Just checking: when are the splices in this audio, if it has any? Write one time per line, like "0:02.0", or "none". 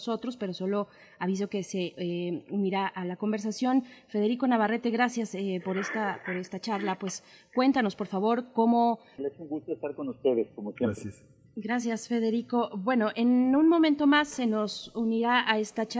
0:09.2